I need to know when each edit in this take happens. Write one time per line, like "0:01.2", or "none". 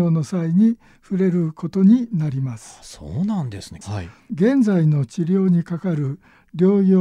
0:03.8